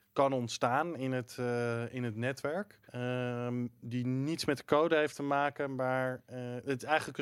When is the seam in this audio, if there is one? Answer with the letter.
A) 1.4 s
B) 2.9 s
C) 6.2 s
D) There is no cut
B